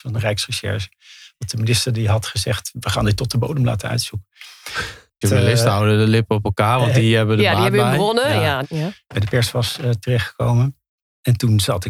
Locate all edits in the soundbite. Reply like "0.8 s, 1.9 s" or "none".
5.2 s, 8.6 s